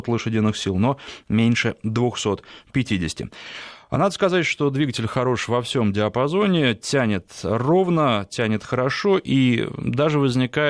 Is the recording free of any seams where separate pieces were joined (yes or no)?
yes